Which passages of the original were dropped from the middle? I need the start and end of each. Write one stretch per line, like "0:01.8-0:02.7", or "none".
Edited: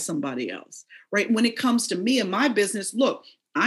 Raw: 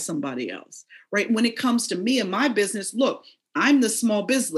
none